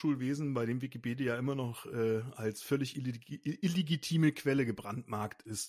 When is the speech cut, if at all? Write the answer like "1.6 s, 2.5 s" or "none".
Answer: none